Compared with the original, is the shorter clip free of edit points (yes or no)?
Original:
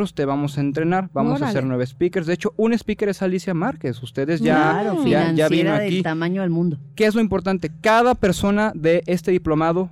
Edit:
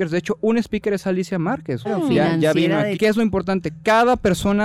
no